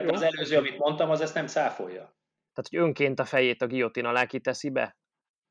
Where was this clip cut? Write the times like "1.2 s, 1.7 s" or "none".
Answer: 2.5 s